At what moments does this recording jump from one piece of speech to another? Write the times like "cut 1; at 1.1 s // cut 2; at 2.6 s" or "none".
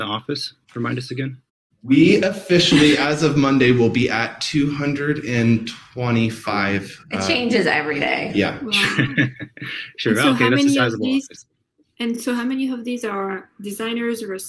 none

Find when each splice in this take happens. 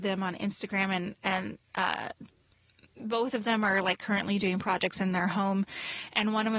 none

